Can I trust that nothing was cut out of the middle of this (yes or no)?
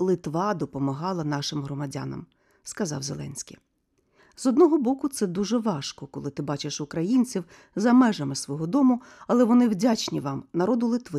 no